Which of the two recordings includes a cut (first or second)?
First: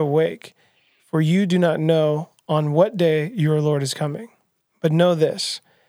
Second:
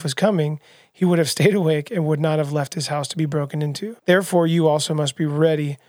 second